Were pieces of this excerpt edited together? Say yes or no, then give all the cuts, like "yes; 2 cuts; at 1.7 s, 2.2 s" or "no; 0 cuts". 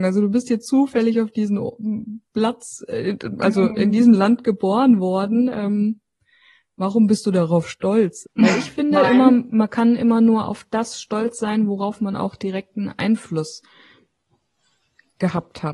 yes; 1 cut; at 8.2 s